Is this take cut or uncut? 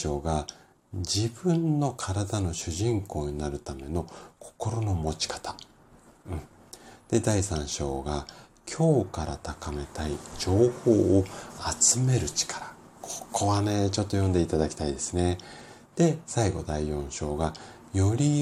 uncut